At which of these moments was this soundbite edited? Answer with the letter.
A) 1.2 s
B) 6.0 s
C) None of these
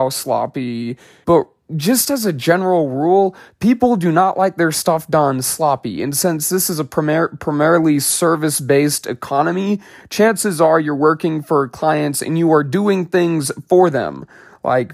A